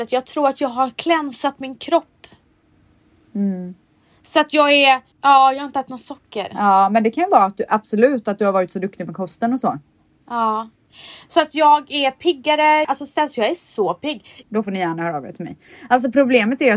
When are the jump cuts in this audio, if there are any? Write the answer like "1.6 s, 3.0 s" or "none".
5.1 s, 12.8 s, 14.4 s